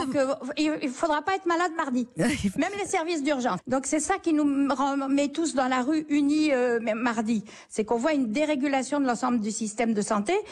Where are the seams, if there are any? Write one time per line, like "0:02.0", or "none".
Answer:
0:02.6
0:03.6